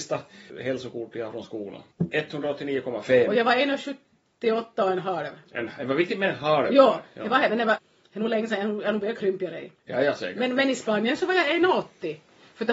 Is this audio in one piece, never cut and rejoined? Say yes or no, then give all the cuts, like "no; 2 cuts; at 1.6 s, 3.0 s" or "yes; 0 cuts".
yes; 0 cuts